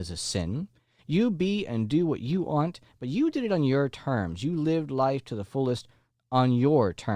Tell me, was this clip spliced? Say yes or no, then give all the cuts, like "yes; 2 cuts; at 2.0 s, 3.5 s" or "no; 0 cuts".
yes; 1 cut; at 2.9 s